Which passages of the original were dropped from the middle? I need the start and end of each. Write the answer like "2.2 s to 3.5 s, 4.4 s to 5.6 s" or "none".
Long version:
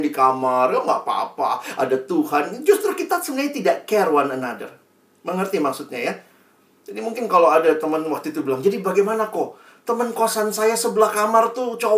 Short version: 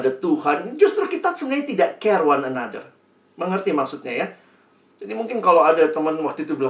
none